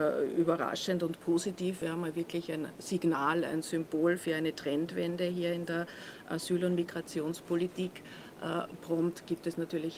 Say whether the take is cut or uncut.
uncut